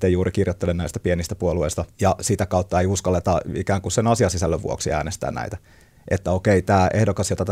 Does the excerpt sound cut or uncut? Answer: cut